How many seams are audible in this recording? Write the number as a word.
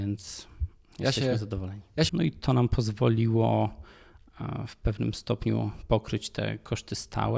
one